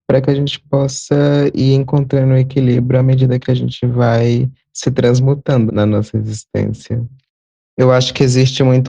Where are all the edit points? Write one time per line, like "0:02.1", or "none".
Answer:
0:05.7